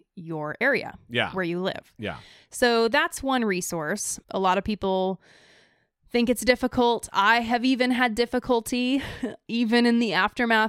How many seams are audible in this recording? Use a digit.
1